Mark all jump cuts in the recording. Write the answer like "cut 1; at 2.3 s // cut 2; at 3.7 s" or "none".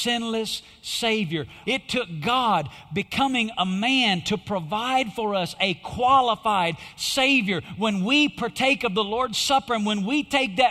cut 1; at 1.6 s